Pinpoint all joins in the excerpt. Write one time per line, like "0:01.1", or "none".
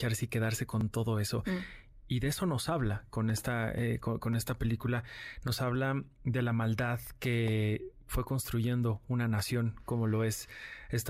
none